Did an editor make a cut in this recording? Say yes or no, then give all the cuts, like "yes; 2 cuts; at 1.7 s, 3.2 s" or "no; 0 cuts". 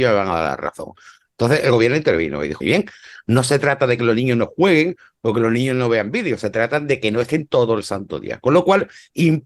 yes; 1 cut; at 2.6 s